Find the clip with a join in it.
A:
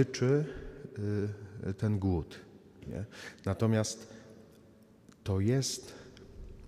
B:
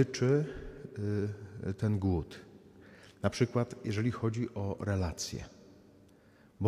A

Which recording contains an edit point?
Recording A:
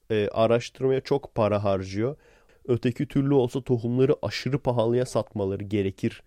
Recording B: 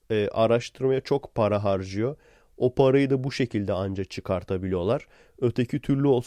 A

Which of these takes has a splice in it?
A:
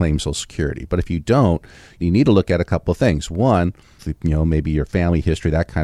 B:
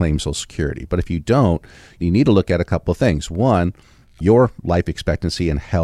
A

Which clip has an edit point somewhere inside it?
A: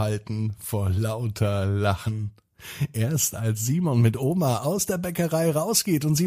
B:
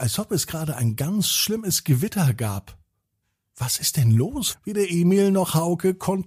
B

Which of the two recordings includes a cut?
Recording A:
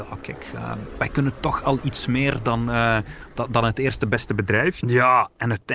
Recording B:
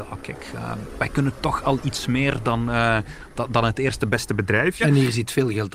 A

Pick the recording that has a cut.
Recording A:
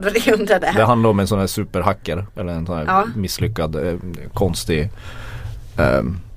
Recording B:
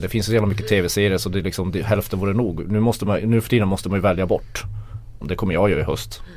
B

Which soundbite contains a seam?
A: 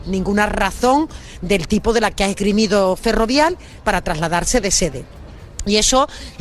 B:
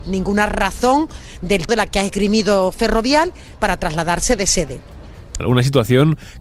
B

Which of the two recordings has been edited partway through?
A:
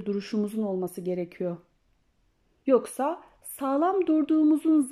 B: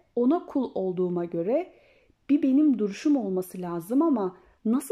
A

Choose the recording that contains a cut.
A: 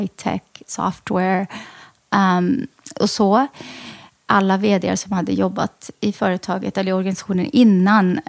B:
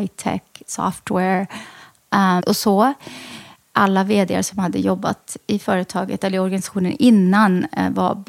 B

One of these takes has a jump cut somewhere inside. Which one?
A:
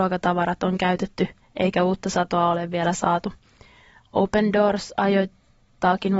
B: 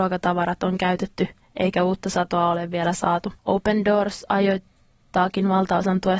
B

